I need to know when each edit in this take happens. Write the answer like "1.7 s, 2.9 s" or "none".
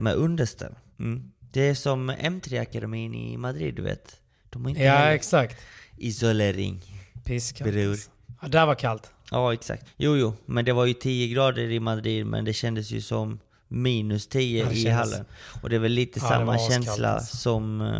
9.8 s

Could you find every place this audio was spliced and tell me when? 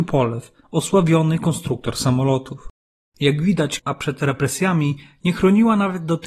3.8 s

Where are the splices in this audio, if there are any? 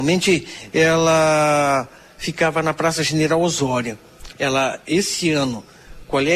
4.3 s

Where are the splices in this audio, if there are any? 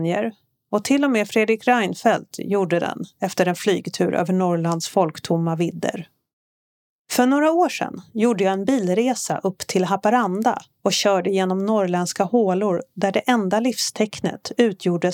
none

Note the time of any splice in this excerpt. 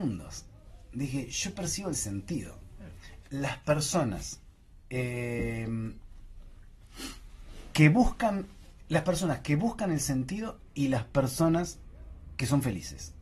3.2 s

